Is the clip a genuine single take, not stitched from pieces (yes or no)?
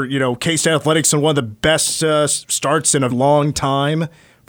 no